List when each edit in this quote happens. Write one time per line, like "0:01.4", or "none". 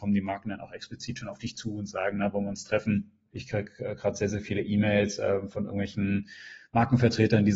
0:03.3